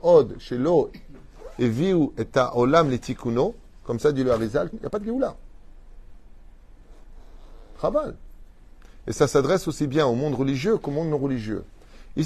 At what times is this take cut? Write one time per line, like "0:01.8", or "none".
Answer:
0:04.7